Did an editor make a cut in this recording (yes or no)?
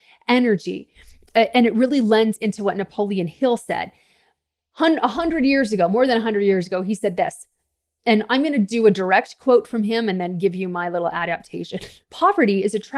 no